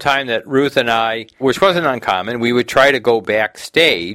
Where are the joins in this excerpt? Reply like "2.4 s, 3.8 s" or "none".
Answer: 1.4 s